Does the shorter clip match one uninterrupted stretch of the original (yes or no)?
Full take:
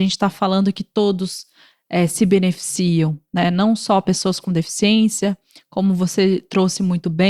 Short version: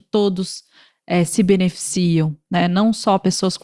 yes